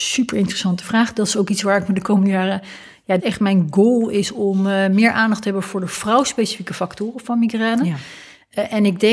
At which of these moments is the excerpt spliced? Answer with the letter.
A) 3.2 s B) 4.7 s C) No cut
A